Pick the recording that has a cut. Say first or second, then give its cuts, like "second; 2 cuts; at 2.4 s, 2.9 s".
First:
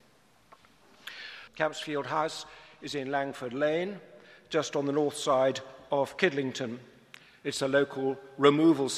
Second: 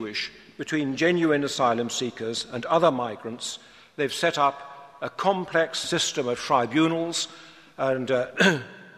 first; 1 cut; at 1.5 s